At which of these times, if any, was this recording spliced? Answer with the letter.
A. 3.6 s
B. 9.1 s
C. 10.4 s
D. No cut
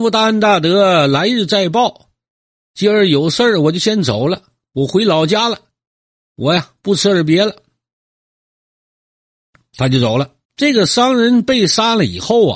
C